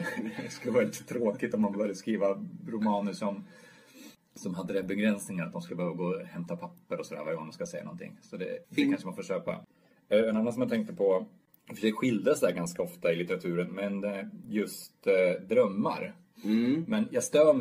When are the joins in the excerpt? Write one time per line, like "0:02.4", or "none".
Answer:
none

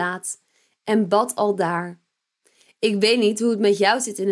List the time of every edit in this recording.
none

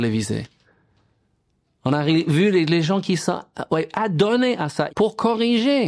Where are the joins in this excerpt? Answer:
0:04.9

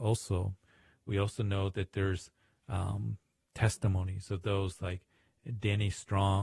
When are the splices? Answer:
none

